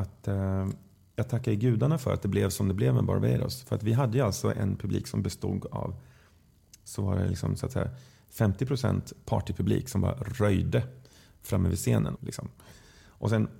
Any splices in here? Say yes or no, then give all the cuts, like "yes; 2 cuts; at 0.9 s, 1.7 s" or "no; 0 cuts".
yes; 2 cuts; at 6.9 s, 12.2 s